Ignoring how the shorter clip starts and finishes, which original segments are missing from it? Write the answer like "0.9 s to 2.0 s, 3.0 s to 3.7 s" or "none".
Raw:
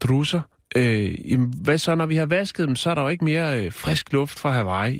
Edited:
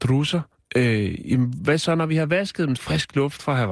2.8 s to 3.7 s